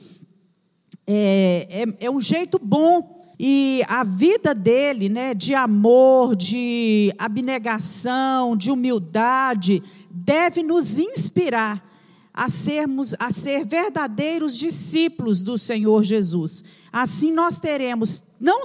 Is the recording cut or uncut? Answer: cut